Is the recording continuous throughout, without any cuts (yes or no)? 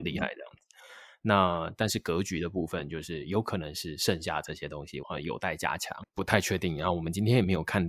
no